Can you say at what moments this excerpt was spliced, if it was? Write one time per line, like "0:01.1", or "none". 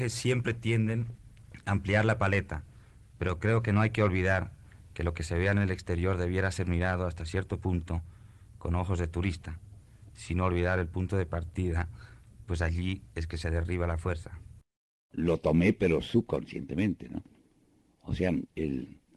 none